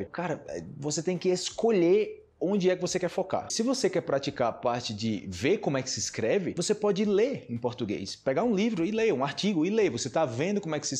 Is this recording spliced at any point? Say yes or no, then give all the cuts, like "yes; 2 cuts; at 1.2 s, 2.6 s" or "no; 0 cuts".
no; 0 cuts